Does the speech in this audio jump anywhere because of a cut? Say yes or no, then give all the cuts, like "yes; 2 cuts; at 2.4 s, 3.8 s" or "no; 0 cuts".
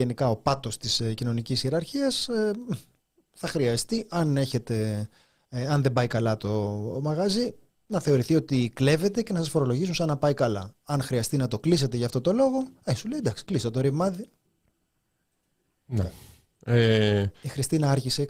no; 0 cuts